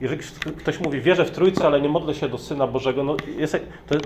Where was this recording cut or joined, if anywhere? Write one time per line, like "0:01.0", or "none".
none